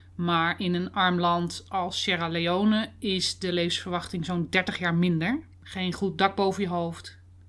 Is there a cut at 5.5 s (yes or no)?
yes